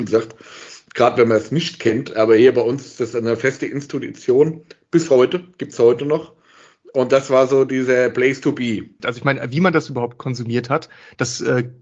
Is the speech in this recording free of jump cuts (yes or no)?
no